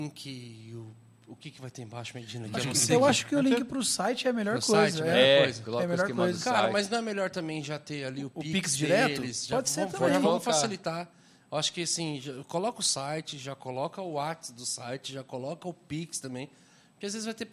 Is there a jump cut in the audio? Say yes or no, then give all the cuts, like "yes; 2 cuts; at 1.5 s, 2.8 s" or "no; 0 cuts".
no; 0 cuts